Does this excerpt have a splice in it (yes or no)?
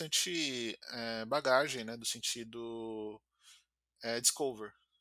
no